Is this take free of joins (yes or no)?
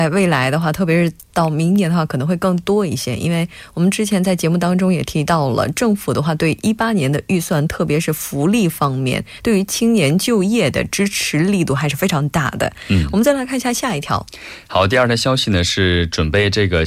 yes